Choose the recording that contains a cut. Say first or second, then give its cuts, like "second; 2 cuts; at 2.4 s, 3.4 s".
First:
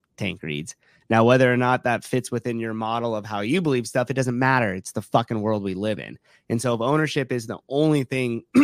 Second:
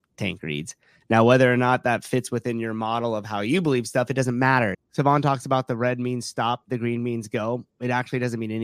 second; 1 cut; at 4.7 s